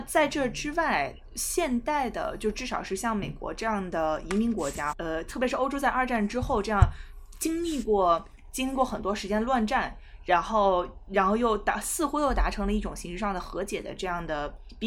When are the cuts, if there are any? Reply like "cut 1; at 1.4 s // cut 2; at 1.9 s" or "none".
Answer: cut 1; at 4.9 s